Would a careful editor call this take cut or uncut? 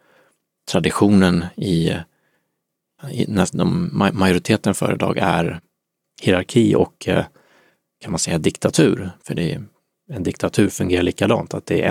cut